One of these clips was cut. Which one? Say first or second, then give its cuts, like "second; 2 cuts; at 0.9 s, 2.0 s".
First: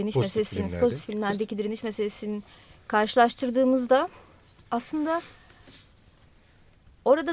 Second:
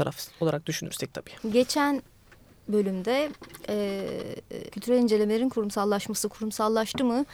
second; 2 cuts; at 1.4 s, 4.7 s